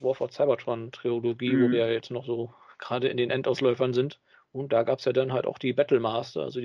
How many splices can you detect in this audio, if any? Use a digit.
0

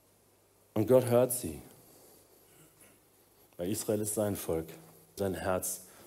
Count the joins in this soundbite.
1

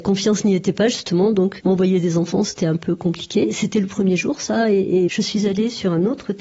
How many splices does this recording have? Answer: 2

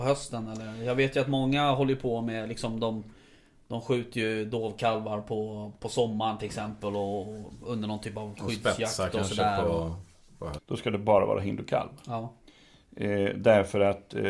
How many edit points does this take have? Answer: 1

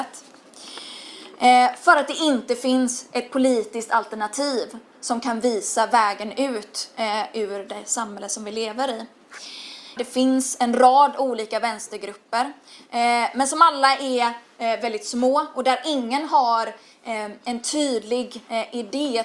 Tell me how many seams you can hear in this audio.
1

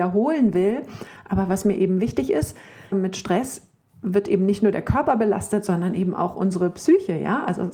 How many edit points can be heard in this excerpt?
1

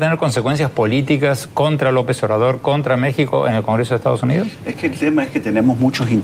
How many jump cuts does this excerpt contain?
0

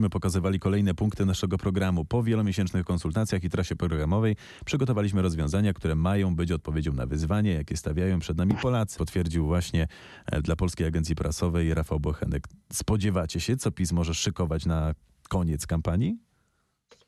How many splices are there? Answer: 1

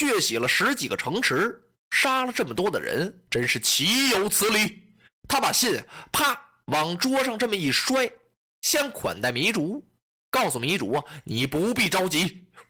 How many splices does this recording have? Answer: 1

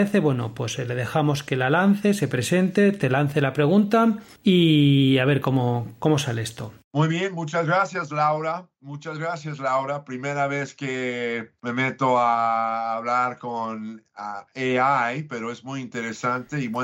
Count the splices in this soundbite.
1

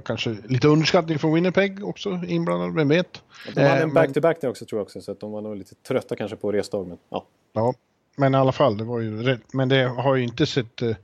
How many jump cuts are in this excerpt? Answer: 1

